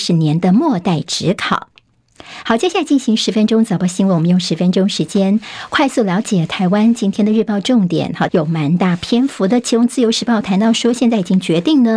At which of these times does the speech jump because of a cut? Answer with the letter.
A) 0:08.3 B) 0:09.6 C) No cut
A